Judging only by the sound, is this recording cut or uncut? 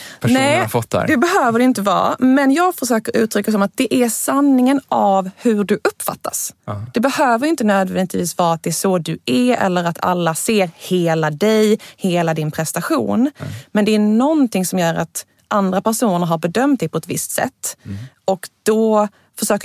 uncut